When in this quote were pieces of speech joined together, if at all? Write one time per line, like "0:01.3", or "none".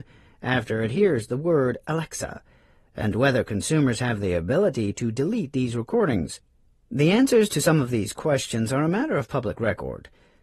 none